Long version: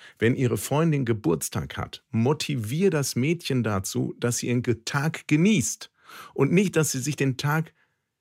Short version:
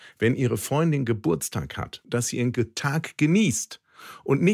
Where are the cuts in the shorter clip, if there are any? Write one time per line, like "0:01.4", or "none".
0:02.0